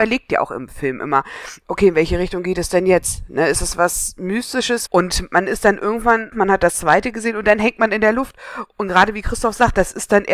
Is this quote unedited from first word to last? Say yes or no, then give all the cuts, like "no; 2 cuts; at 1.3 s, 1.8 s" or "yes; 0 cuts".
no; 2 cuts; at 4.9 s, 6.3 s